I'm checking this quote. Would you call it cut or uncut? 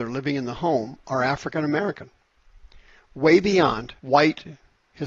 cut